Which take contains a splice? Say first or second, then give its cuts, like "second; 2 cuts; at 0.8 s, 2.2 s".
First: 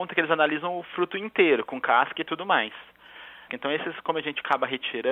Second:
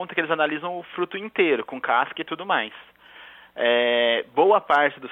first; 1 cut; at 3.5 s